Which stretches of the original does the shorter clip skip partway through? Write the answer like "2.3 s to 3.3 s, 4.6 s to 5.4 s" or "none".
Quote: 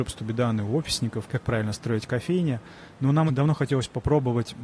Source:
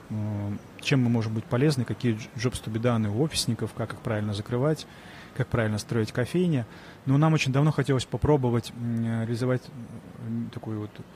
3.7 s to 5.3 s, 7.3 s to 7.4 s

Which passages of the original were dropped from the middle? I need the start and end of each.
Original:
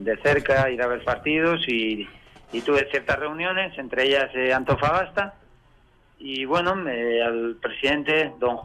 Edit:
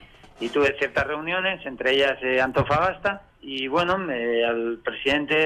5.4 s to 6.1 s

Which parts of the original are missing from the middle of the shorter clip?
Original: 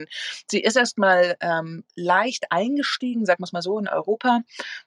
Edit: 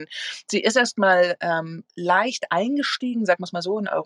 none

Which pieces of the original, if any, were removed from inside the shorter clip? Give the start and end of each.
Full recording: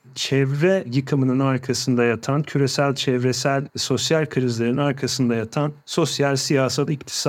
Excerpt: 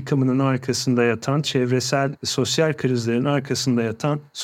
2.4 s to 3.0 s

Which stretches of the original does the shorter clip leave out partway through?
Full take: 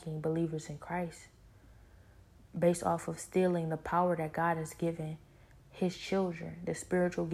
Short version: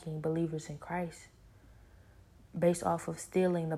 none

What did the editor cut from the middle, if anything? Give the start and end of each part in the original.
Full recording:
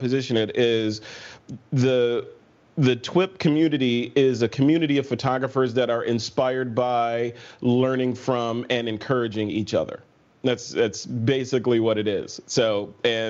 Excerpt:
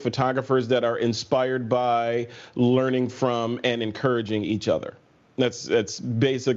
none

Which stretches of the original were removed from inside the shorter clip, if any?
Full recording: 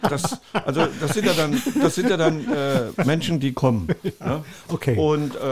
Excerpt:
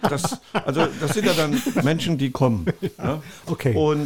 1.8 s to 3.0 s

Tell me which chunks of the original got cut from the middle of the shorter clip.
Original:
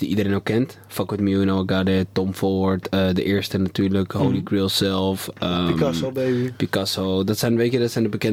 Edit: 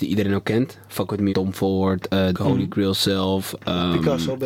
1.3 s to 2.1 s, 3.1 s to 4.1 s

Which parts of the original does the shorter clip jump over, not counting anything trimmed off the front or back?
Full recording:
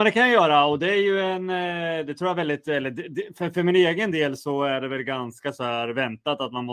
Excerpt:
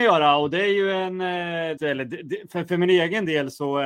2.1 s to 2.6 s

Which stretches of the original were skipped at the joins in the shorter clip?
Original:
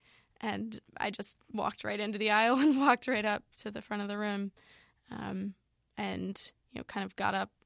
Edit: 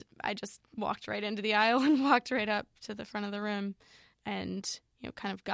4.9 s to 5.8 s

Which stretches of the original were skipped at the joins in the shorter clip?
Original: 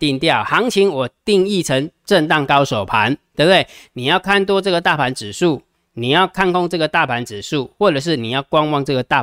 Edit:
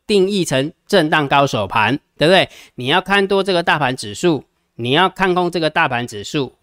none

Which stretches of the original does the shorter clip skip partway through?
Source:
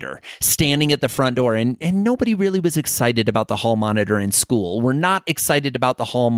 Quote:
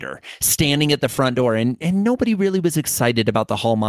none

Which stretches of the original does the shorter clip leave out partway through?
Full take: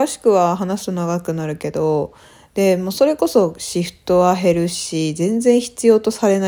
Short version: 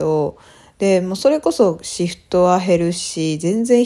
none

